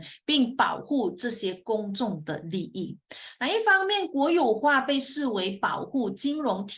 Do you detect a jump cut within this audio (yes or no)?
yes